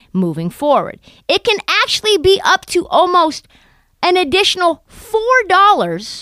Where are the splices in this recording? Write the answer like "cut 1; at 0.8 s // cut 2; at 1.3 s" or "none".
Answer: none